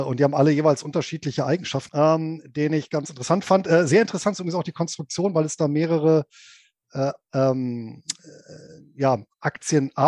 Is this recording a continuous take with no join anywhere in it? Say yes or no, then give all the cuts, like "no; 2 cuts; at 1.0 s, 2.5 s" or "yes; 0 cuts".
no; 1 cut; at 1.9 s